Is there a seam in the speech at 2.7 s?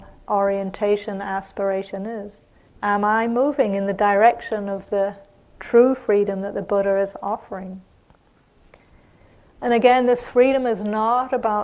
yes; 1 cut; at 2.7 s

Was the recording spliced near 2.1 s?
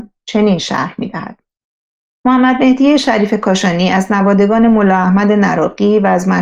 yes; 1 cut; at 2.1 s

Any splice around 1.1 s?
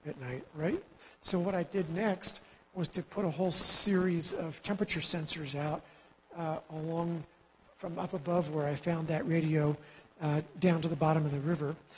yes; 1 cut; at 1.1 s

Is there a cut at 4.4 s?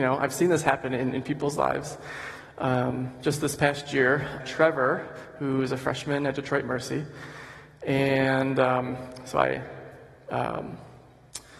yes; 1 cut; at 4.4 s

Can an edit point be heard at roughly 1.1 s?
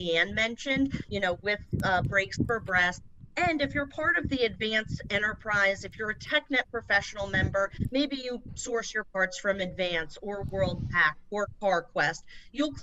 yes; 1 cut; at 1.1 s

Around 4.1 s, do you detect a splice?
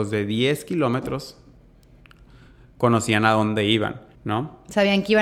yes; 1 cut; at 4.1 s

